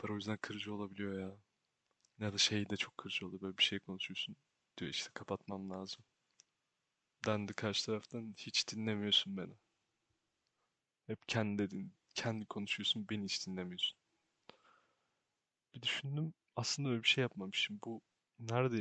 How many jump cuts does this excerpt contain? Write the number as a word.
one